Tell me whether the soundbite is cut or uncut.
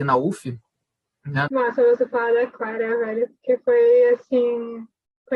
cut